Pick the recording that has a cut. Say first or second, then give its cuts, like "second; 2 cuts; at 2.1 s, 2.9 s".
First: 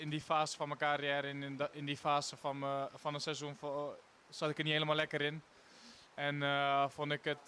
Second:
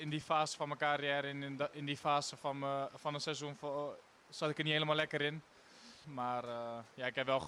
second; 1 cut; at 6.0 s